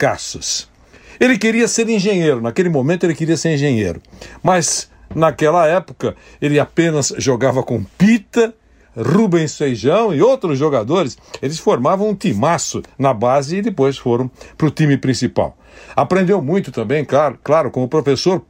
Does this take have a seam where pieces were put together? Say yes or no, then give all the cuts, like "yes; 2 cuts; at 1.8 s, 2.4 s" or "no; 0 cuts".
no; 0 cuts